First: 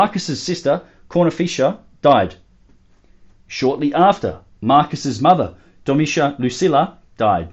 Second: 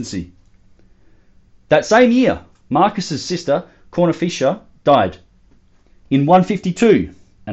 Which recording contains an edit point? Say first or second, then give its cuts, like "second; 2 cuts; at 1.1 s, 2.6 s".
second; 1 cut; at 6.0 s